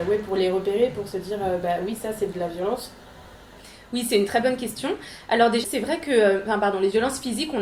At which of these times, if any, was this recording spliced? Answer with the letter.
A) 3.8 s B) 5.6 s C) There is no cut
B